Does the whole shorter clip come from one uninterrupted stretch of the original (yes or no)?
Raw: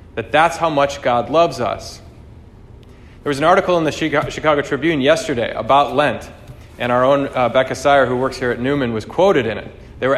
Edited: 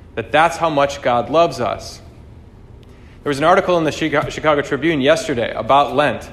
yes